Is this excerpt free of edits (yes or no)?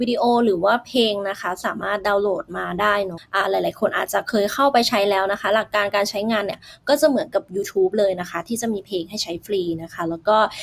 no